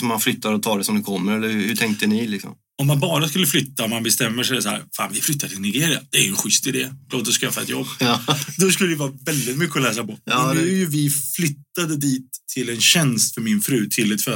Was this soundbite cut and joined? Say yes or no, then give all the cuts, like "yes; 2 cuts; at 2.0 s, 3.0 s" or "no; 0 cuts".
no; 0 cuts